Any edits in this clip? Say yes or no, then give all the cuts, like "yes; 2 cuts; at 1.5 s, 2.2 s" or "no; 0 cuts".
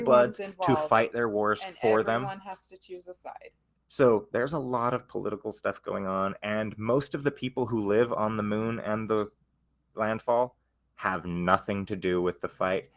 no; 0 cuts